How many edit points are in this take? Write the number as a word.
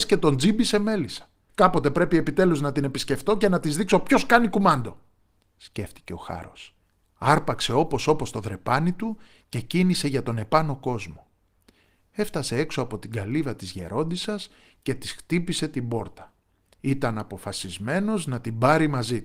one